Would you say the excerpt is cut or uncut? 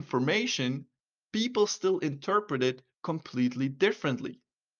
uncut